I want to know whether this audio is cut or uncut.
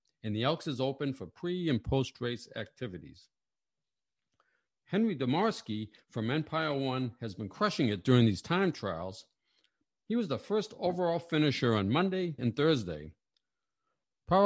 cut